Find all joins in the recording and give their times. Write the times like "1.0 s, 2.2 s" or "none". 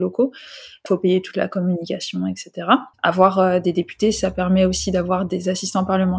2.9 s

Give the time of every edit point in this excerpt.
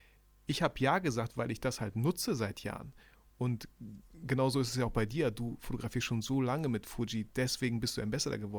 none

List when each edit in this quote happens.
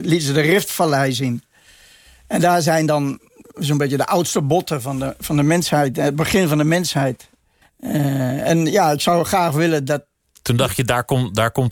7.6 s

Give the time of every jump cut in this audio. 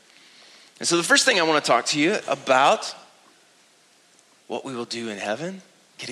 none

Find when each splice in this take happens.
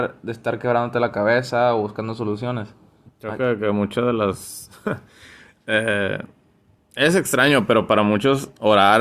3.1 s

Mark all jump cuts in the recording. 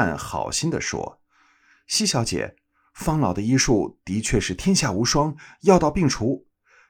none

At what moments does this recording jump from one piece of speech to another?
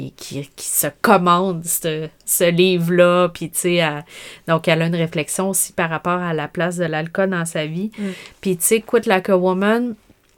none

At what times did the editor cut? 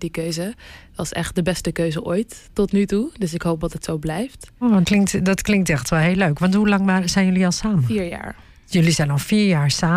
4.8 s

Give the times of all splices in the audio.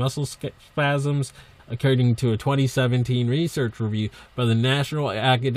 1.6 s

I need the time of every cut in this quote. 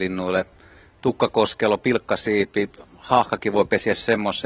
none

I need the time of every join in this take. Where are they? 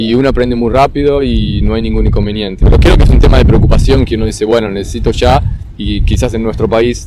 2.6 s

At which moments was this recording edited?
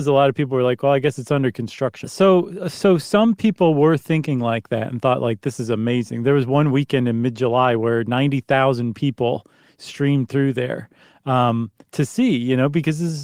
2.0 s

